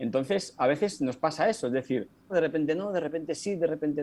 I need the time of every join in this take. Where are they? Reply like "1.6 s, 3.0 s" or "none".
2.3 s